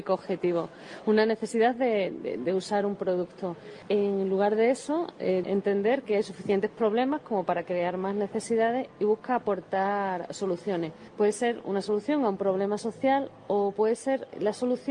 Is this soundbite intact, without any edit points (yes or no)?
no